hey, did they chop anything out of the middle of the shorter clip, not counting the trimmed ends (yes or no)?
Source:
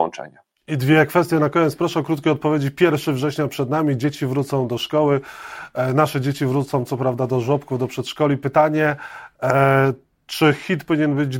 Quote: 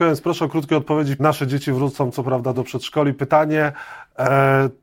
yes